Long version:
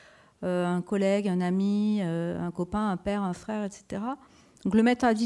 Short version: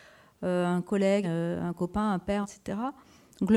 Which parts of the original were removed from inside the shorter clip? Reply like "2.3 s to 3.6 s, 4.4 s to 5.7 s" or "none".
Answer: 1.2 s to 2.0 s, 3.2 s to 3.7 s